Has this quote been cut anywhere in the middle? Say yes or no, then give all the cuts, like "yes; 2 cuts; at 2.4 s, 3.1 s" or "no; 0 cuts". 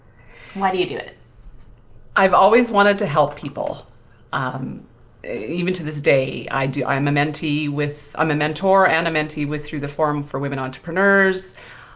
no; 0 cuts